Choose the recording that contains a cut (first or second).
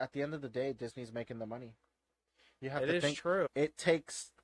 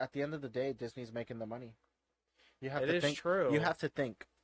first